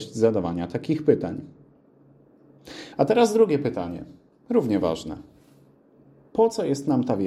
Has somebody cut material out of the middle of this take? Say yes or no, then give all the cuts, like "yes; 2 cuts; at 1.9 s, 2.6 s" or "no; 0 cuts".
no; 0 cuts